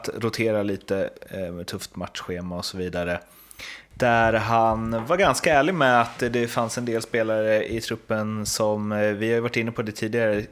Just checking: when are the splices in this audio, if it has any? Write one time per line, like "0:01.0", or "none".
0:03.9